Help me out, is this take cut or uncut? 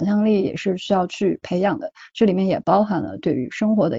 uncut